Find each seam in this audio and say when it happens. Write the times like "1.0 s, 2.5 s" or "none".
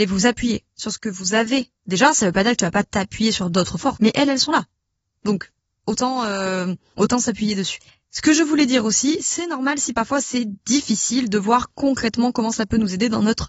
1.8 s, 4.0 s